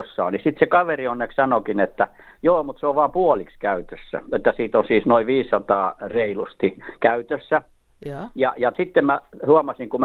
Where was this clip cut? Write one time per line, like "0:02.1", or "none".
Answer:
none